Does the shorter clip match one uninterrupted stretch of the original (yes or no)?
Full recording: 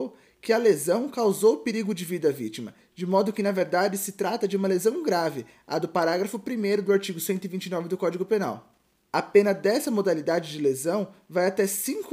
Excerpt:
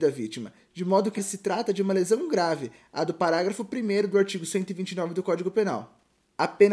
no